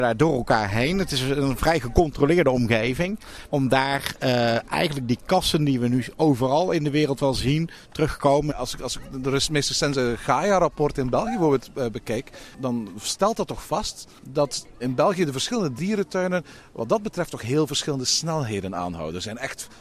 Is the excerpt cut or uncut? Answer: cut